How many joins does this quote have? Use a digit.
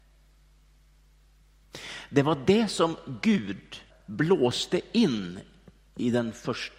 1